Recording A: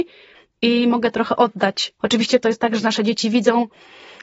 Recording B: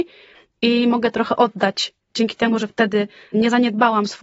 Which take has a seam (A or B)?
A